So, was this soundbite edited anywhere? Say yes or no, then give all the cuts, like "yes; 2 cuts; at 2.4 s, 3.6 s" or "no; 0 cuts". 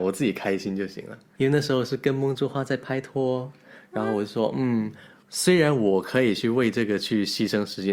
no; 0 cuts